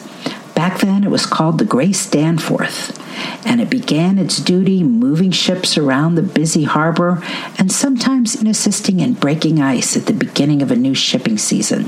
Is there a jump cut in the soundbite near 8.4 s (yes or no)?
yes